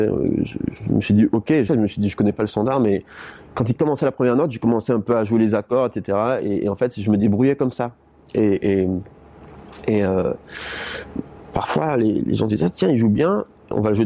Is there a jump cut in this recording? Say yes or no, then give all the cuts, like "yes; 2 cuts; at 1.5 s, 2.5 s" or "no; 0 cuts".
yes; 1 cut; at 1.7 s